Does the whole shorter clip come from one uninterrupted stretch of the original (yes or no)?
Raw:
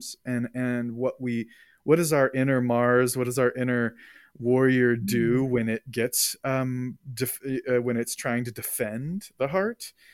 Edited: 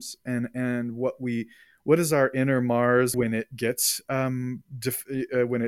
no